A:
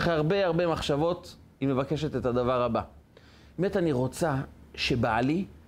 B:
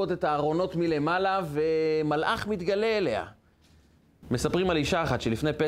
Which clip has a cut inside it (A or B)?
B